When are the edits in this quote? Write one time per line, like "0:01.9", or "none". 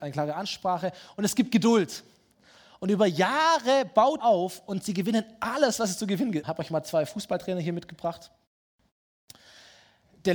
0:04.2
0:06.4

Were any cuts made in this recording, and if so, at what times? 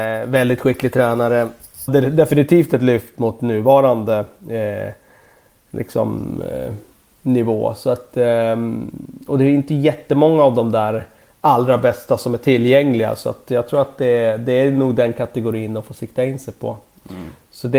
0:01.9

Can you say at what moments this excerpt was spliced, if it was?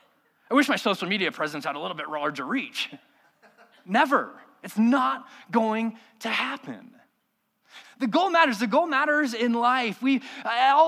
0:07.8

